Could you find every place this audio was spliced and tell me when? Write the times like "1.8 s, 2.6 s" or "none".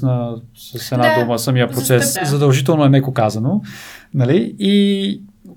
2.1 s